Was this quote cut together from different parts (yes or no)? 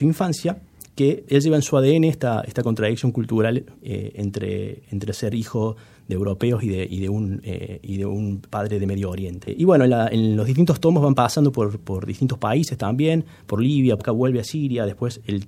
yes